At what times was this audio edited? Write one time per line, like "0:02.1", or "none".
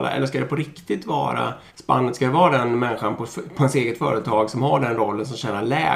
0:01.7